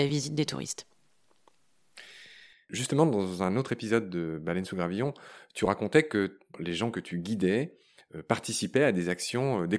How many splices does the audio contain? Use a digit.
0